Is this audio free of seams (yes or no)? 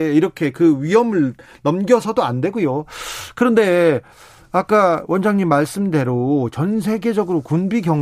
yes